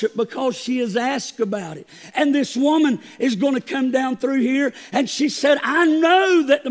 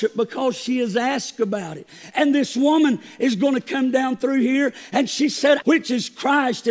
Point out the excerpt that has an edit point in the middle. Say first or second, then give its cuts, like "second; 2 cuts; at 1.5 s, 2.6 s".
second; 1 cut; at 5.6 s